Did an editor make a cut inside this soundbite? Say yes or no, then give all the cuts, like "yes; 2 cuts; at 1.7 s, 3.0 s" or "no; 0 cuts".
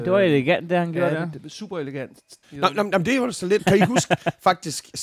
yes; 2 cuts; at 2.4 s, 3.6 s